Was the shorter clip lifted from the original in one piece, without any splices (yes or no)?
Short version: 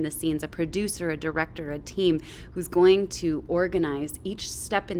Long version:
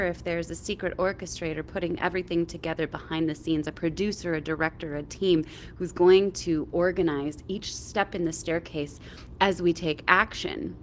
yes